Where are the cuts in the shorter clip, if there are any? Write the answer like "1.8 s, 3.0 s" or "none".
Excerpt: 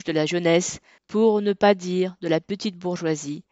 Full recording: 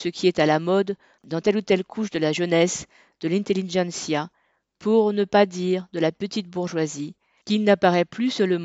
1.0 s